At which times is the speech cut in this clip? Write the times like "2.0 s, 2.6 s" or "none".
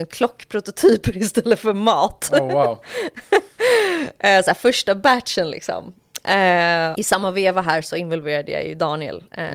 6.9 s